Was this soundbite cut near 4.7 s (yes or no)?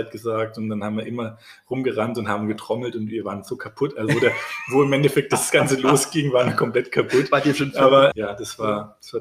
no